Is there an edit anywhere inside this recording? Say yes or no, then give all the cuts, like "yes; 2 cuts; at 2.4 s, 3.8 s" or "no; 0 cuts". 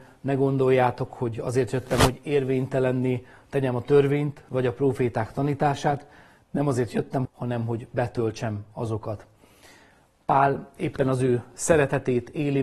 yes; 1 cut; at 7.2 s